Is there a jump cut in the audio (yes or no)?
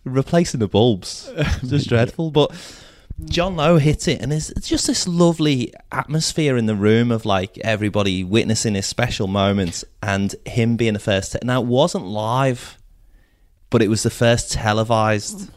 no